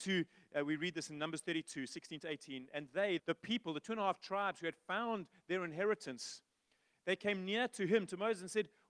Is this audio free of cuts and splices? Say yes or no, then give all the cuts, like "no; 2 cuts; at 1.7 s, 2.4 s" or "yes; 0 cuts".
no; 1 cut; at 3.2 s